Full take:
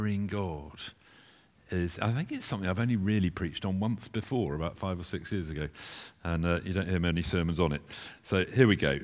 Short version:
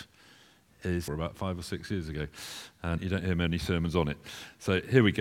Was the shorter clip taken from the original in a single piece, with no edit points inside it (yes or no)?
no